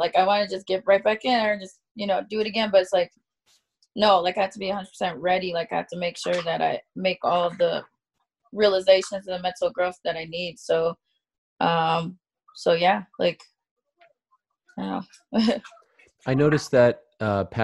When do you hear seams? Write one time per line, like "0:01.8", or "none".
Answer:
none